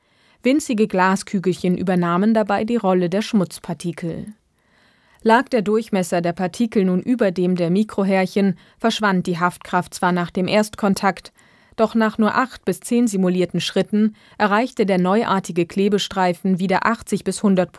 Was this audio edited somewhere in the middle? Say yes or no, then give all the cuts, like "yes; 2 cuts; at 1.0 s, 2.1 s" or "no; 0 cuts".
no; 0 cuts